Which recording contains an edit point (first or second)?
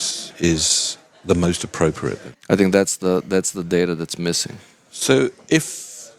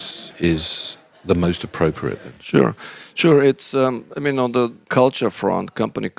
first